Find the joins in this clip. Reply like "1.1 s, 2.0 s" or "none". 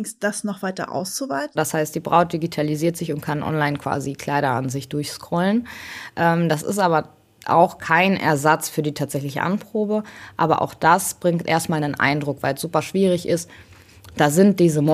1.6 s